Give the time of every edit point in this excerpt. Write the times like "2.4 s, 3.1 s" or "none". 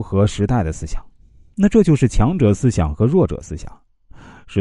1.5 s